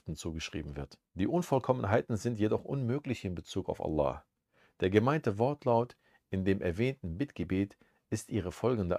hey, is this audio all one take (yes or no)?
no